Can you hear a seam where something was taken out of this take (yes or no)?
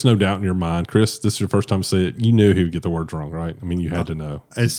no